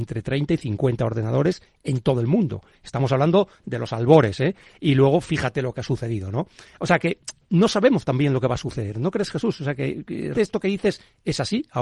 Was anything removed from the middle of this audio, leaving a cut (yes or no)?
yes